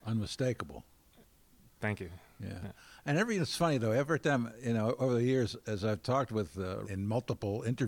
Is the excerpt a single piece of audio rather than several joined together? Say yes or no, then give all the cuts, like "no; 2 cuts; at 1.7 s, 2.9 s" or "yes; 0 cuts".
no; 1 cut; at 6.8 s